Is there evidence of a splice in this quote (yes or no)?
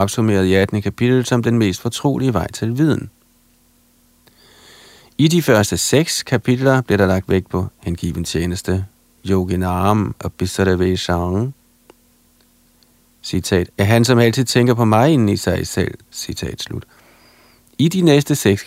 yes